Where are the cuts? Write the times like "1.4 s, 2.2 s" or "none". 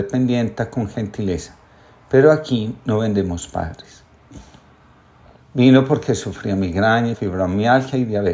5.4 s, 7.1 s